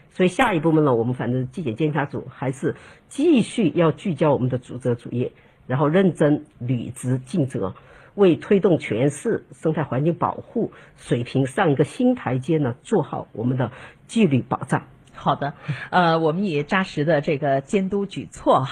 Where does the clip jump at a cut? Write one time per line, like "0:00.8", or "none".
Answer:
none

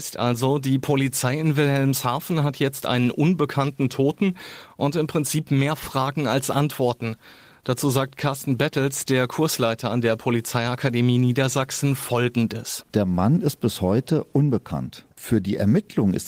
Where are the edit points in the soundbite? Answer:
0:15.1

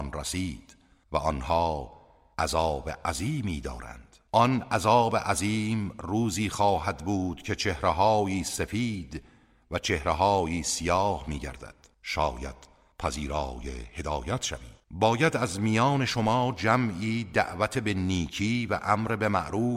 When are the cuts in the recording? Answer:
0:11.9
0:14.8

